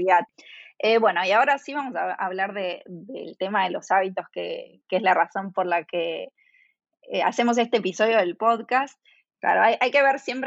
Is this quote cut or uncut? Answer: cut